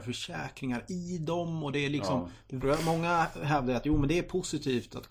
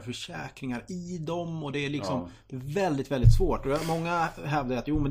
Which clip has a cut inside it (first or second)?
first